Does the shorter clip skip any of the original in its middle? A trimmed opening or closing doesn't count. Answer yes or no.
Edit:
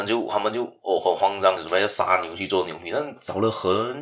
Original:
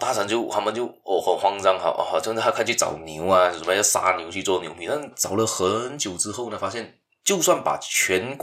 yes